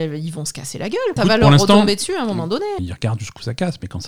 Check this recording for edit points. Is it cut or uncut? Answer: cut